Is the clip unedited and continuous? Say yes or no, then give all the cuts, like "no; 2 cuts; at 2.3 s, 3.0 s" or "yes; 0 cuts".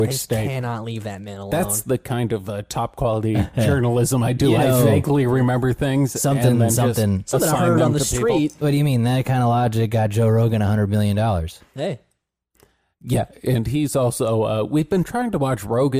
yes; 0 cuts